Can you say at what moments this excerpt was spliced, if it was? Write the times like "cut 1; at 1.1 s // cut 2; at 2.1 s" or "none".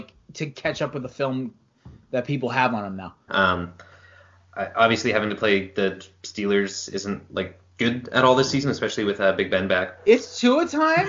cut 1; at 3.3 s // cut 2; at 10.0 s